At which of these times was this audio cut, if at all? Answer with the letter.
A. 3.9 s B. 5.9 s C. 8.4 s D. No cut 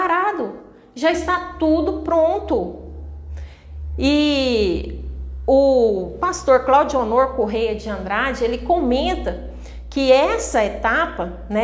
D